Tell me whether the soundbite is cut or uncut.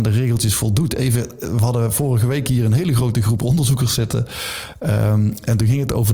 uncut